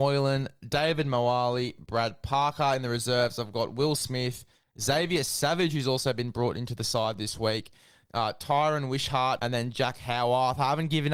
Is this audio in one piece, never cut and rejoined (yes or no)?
no